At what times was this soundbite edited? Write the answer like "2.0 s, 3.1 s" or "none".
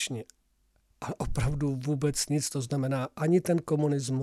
none